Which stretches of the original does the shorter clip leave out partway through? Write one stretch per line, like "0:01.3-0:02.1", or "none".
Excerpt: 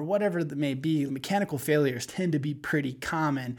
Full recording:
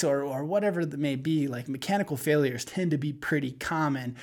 0:01.5-0:01.7

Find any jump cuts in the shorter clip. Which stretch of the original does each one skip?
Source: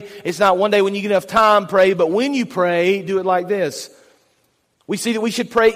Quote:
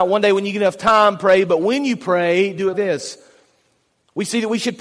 0:03.2-0:03.5

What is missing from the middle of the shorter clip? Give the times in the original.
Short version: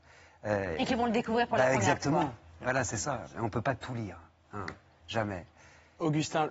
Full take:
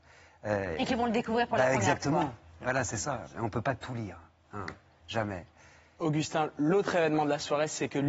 none

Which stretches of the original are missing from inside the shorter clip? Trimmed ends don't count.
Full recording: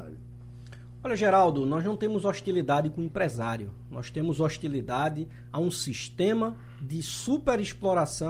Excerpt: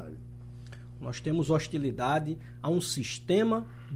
0:01.0-0:03.9

